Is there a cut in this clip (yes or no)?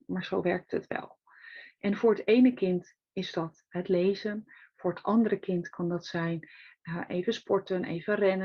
yes